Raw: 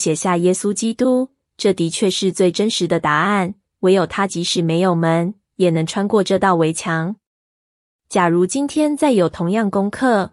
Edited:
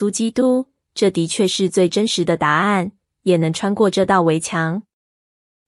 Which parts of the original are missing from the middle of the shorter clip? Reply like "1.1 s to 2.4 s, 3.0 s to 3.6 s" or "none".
3.8 s to 5.5 s